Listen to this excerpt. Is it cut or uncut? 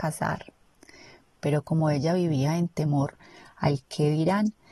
cut